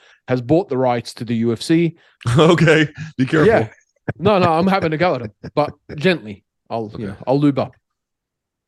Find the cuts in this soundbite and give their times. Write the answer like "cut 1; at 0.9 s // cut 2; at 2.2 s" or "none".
cut 1; at 2.2 s